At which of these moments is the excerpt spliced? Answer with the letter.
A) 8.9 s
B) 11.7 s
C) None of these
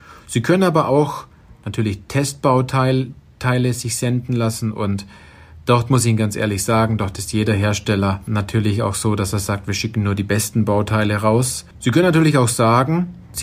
B